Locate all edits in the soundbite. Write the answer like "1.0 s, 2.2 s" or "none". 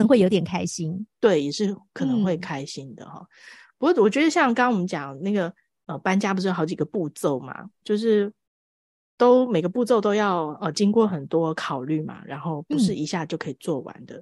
7.8 s